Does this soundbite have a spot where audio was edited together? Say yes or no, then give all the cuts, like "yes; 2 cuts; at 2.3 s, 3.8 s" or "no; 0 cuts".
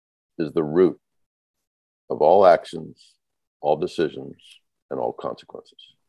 no; 0 cuts